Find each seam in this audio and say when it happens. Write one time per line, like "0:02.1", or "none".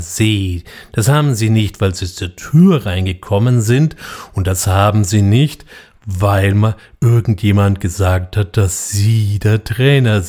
none